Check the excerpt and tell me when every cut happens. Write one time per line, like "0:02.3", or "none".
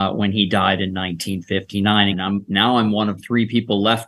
0:02.1
0:03.2